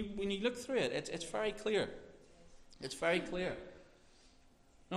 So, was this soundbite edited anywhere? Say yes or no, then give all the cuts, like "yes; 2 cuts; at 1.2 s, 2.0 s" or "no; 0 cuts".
no; 0 cuts